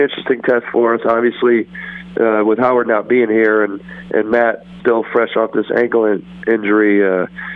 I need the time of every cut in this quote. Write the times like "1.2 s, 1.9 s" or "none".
4.8 s